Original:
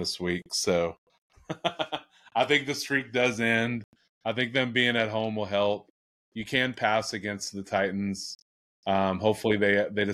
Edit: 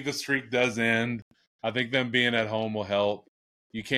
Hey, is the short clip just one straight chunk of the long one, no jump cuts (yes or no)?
yes